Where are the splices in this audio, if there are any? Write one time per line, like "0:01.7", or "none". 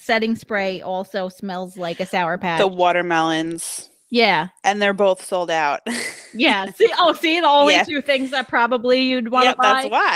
none